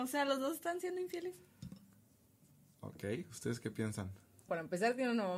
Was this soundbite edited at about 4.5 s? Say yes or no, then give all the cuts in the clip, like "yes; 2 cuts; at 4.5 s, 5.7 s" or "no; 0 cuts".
yes; 1 cut; at 4.5 s